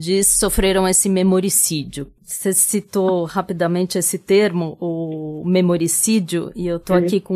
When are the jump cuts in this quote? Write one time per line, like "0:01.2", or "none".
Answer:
0:02.2

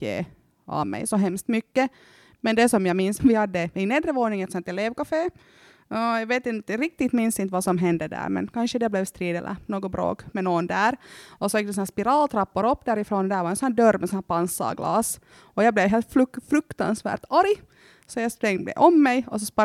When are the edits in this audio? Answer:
0:03.2

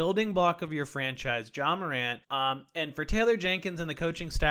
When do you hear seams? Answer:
0:02.2

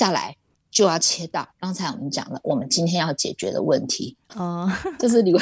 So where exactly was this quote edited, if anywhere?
0:01.5
0:04.2

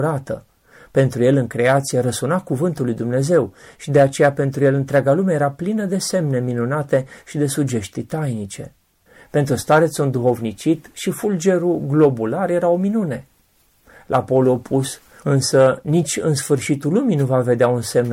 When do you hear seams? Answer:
0:15.2

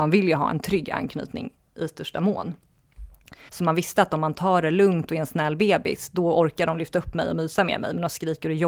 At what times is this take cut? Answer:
0:03.5

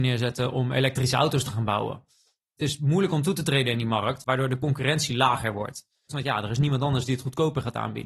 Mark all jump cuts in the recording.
0:06.1

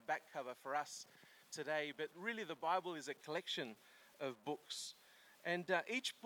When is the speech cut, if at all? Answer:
none

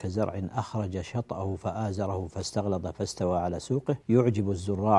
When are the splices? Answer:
0:04.0

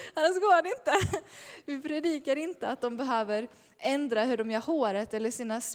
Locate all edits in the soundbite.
none

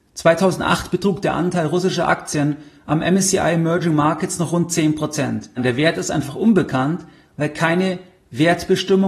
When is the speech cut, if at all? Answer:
0:05.6

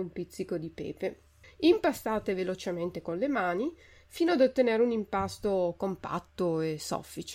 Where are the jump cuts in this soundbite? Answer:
0:01.4

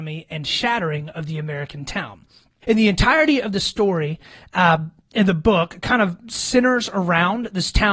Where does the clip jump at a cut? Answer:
0:02.6

